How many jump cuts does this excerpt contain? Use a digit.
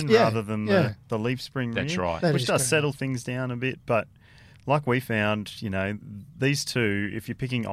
1